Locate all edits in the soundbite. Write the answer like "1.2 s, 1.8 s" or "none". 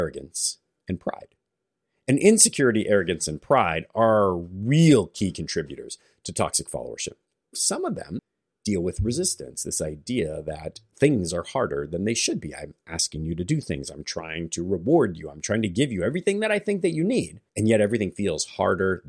7.5 s, 17.5 s